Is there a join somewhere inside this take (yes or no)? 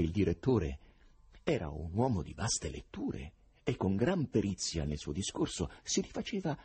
no